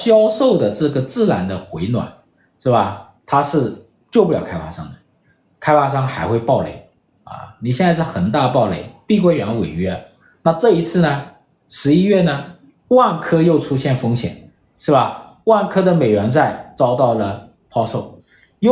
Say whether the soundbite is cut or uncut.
uncut